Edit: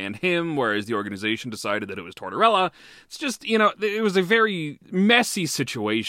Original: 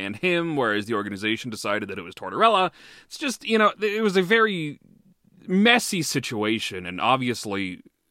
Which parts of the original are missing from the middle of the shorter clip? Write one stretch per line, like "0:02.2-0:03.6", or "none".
0:04.8-0:05.4